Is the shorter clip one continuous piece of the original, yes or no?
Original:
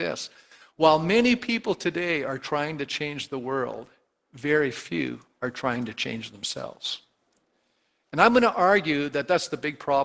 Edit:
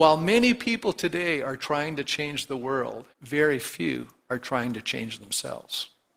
no